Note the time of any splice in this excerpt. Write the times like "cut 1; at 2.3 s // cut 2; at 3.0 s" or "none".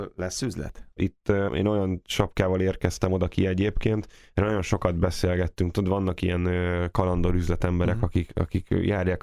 cut 1; at 1.0 s